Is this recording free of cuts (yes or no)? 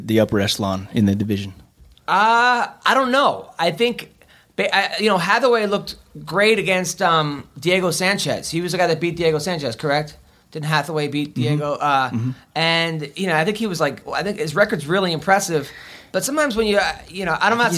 yes